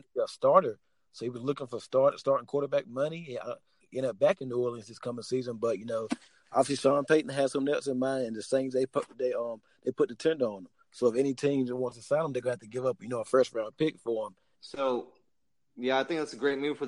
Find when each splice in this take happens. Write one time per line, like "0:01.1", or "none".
0:03.8
0:14.5